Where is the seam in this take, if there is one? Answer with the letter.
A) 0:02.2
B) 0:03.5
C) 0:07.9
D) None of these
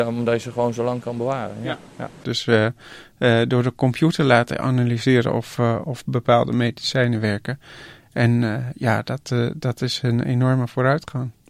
A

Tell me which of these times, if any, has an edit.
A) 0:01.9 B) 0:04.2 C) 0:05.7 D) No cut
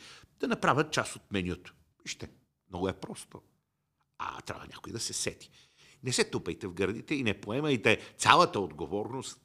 D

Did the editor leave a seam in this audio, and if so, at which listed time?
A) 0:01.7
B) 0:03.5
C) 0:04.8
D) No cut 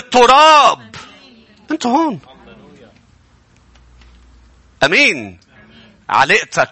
A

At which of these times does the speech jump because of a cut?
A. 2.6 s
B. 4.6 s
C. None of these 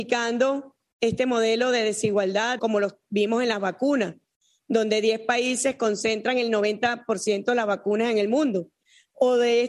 A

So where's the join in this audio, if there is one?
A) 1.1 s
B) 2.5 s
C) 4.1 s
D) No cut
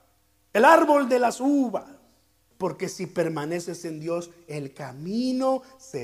B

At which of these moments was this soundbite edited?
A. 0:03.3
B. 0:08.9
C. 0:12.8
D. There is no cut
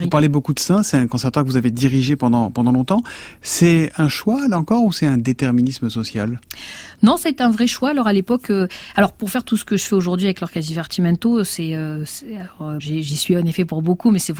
C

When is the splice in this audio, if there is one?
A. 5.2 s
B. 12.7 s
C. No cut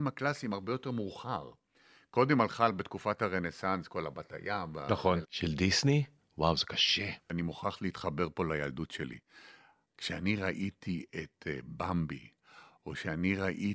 A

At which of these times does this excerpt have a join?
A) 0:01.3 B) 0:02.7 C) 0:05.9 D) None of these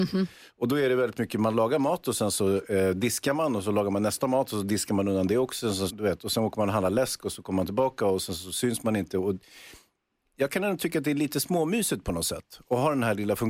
C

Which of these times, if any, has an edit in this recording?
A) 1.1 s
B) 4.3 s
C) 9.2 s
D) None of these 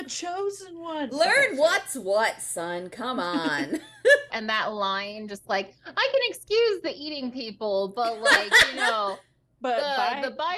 B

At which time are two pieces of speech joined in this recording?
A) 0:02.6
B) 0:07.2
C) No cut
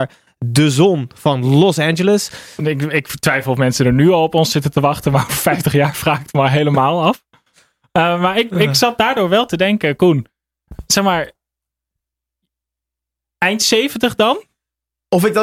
A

